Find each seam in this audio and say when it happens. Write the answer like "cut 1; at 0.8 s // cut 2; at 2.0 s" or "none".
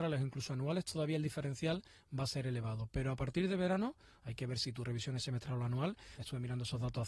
cut 1; at 6.2 s